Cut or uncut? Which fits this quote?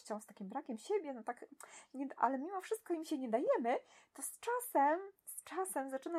uncut